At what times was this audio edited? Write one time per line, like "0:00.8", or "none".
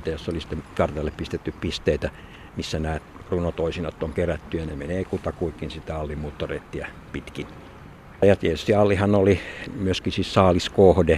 none